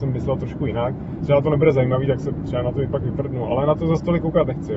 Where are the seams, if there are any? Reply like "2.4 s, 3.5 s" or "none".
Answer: 1.2 s

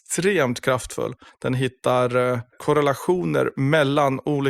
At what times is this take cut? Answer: 1.3 s

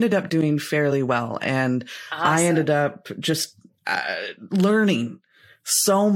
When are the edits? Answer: none

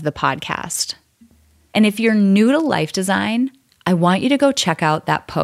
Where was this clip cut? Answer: 1.7 s

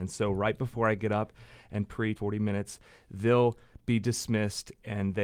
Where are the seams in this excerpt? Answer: 2.2 s

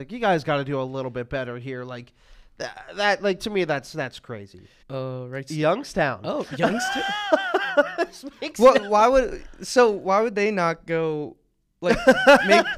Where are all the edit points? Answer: 4.8 s

